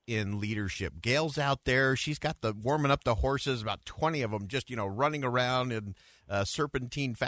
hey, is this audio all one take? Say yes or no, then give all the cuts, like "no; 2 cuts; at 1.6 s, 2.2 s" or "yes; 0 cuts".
yes; 0 cuts